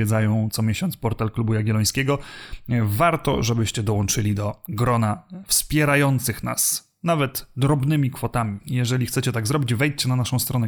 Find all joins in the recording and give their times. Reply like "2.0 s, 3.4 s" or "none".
8.6 s